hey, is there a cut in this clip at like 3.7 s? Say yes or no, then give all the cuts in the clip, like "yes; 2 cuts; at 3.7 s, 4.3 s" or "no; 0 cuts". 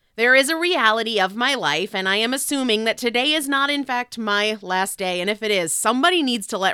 no; 0 cuts